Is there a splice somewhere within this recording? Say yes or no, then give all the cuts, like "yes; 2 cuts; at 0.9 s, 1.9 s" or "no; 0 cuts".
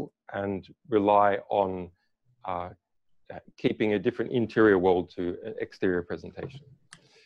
no; 0 cuts